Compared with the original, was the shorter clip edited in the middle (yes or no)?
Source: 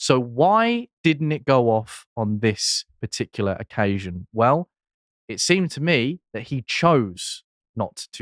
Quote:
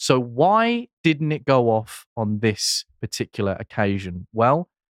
no